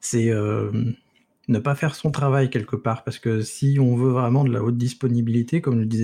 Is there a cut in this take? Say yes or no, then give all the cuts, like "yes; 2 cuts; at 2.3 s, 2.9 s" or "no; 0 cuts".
no; 0 cuts